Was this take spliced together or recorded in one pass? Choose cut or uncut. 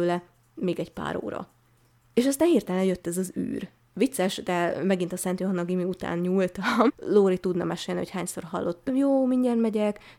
cut